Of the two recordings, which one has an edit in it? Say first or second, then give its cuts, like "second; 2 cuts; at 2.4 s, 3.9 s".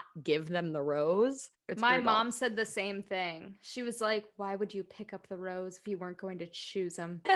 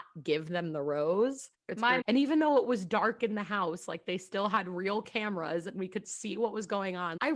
second; 1 cut; at 2.0 s